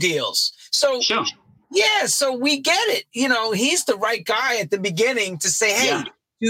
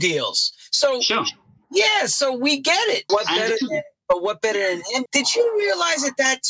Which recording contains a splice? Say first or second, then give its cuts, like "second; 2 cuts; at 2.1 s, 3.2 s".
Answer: second; 2 cuts; at 3.1 s, 5.1 s